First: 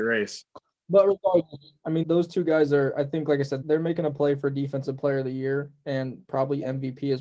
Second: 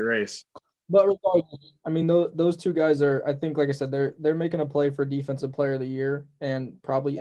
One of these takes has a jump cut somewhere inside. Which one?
first; 2 cuts; at 2.0 s, 3.6 s

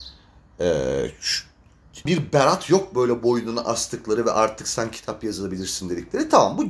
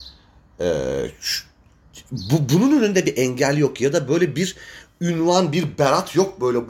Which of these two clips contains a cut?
first; 1 cut; at 2.1 s

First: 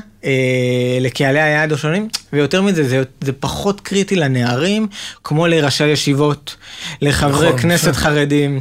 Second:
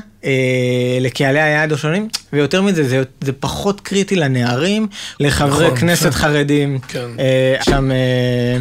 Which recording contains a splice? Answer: second; 2 cuts; at 5.2 s, 7.6 s

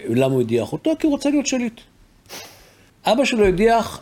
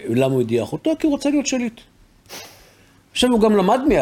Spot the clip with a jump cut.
first; 1 cut; at 2.9 s

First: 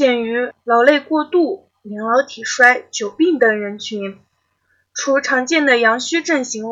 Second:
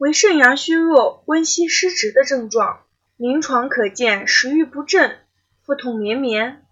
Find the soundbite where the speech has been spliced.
second; 1 cut; at 3.1 s

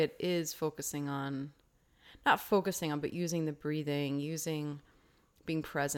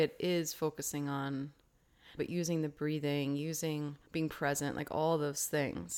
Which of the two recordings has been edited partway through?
second; 2 cuts; at 2.2 s, 4.1 s

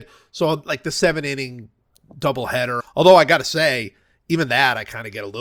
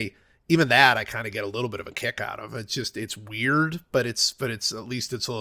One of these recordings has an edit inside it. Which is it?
first; 1 cut; at 2.8 s

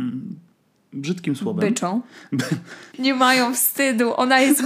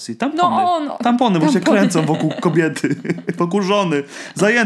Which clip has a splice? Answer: first; 1 cut; at 2.9 s

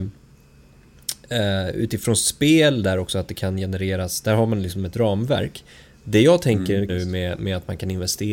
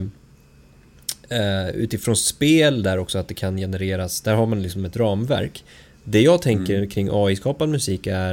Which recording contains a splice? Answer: first; 1 cut; at 6.9 s

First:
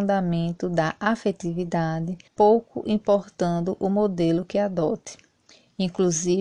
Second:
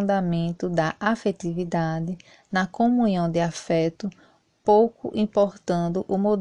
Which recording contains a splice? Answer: first; 1 cut; at 2.3 s

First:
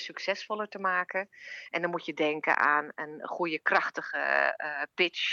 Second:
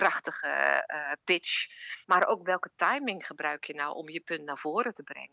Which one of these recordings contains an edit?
second; 1 cut; at 2.0 s

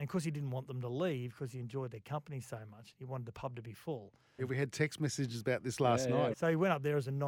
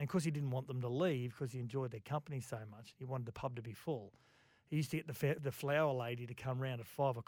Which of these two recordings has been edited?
first; 2 cuts; at 4.4 s, 6.3 s

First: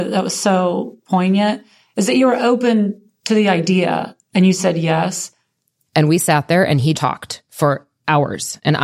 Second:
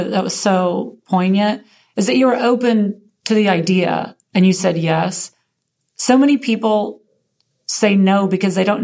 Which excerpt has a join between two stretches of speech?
first; 2 cuts; at 5.9 s, 6.9 s

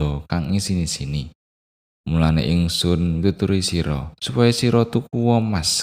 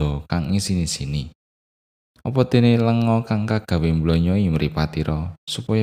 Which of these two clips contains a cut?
first; 2 cuts; at 2.0 s, 4.2 s

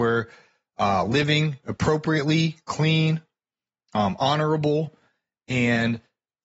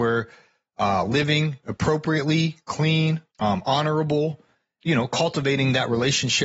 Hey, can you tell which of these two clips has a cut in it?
second; 2 cuts; at 3.3 s, 4.8 s

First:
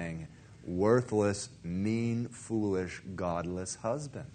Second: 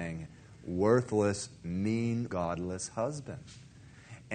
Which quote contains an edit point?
second; 1 cut; at 2.3 s

